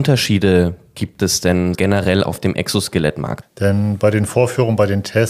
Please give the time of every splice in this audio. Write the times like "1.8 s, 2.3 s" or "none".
1.7 s, 3.4 s